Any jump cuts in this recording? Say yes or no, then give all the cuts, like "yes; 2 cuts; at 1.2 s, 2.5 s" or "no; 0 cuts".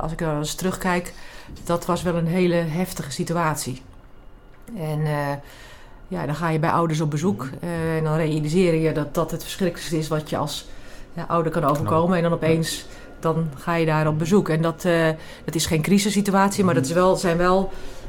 no; 0 cuts